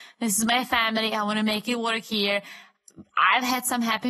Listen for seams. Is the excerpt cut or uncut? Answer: uncut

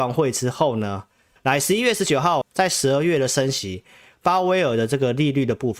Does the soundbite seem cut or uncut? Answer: cut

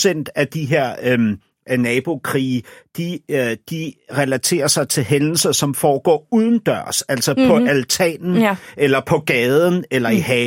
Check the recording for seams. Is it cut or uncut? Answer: uncut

